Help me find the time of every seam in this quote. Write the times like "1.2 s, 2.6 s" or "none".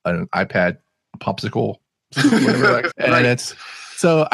2.9 s